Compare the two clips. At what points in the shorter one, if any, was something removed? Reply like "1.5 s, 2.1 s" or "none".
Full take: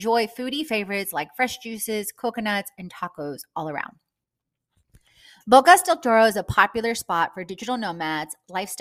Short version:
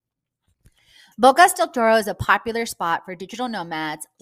none